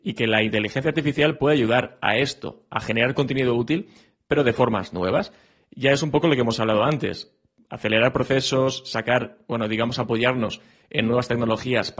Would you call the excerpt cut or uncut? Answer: uncut